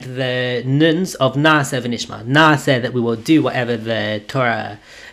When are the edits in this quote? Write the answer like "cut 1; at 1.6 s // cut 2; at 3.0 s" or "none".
none